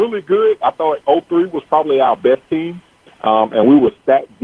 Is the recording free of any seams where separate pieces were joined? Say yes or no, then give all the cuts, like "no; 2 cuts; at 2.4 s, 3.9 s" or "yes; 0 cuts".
yes; 0 cuts